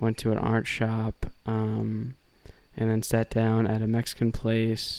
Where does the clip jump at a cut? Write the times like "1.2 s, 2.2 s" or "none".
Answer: none

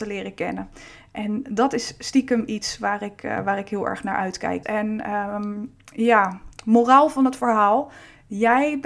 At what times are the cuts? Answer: 4.6 s

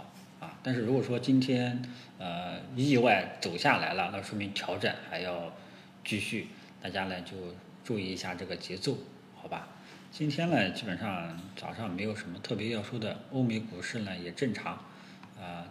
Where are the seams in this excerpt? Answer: none

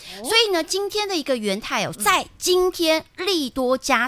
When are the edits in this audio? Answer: 1.9 s

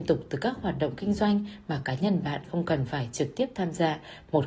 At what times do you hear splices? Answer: none

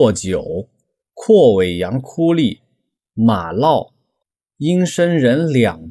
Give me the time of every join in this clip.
none

